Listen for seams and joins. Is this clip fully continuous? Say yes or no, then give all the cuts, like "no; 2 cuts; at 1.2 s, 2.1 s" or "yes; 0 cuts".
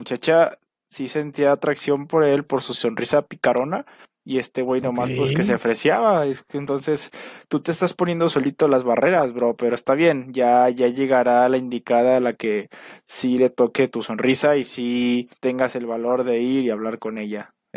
no; 1 cut; at 15.4 s